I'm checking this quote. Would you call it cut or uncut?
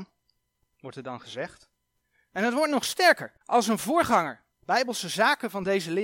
cut